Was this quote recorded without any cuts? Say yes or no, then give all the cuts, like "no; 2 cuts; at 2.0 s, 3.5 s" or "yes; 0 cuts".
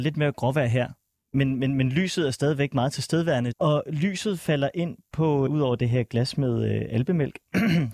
no; 2 cuts; at 3.5 s, 5.5 s